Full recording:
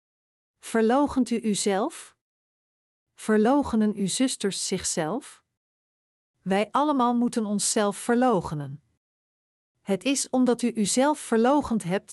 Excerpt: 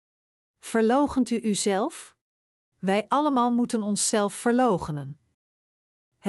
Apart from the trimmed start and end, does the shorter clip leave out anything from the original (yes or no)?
yes